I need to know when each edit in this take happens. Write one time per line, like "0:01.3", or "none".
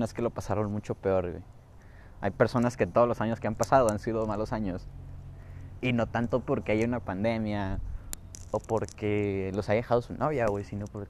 none